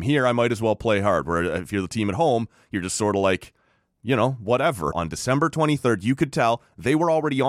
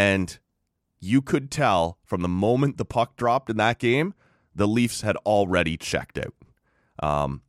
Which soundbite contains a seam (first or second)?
first